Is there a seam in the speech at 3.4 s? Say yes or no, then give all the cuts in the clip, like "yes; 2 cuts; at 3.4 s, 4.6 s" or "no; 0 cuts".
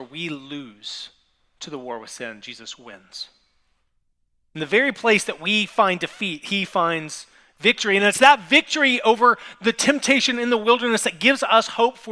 no; 0 cuts